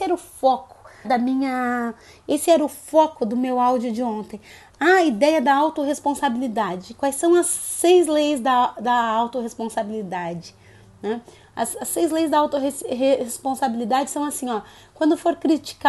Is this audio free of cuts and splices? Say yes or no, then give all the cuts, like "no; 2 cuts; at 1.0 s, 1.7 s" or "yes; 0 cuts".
no; 1 cut; at 1.0 s